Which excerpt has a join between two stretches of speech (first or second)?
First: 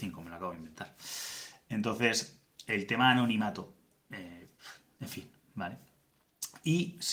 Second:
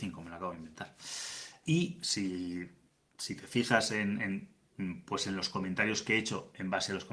second